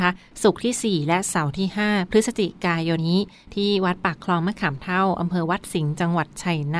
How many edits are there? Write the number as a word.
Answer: one